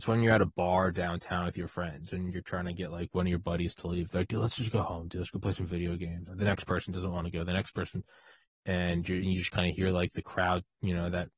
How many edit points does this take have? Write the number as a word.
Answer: two